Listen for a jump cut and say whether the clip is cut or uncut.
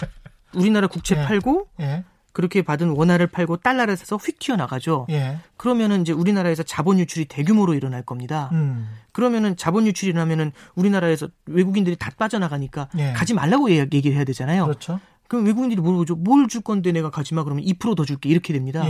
uncut